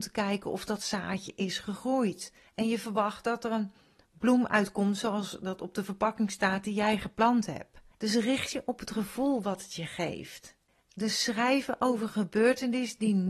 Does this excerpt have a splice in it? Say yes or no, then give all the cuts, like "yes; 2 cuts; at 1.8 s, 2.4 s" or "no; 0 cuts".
yes; 2 cuts; at 2.5 s, 7.9 s